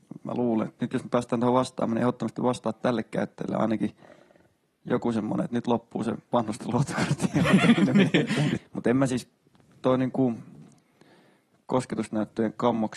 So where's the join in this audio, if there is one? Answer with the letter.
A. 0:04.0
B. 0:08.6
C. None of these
B